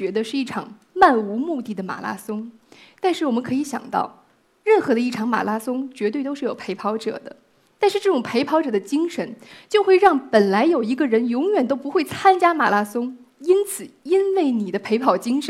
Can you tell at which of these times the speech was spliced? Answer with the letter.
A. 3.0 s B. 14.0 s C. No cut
C